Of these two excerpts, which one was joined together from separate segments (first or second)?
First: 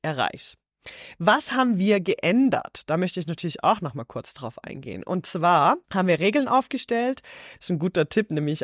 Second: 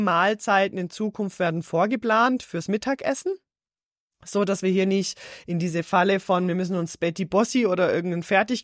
first